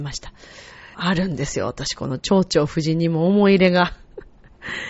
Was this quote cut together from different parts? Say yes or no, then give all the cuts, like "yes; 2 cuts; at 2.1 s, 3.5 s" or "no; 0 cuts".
yes; 1 cut; at 0.9 s